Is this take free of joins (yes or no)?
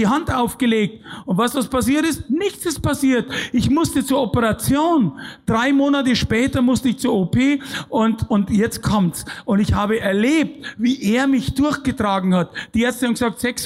yes